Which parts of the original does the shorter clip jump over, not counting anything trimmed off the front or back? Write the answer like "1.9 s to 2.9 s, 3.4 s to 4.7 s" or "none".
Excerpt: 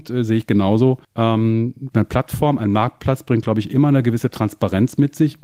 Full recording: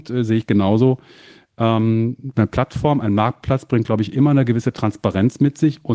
1.0 s to 1.5 s